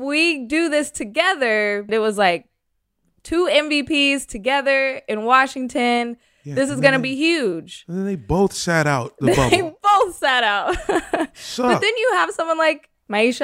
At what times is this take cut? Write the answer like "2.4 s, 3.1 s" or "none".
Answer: 1.9 s